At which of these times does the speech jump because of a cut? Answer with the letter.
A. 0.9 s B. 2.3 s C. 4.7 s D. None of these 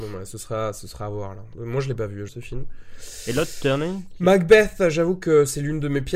B